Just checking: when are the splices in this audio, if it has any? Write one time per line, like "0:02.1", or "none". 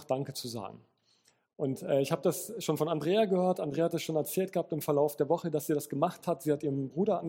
none